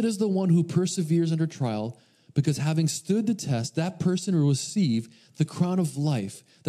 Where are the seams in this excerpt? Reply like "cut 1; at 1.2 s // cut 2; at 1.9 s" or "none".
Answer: none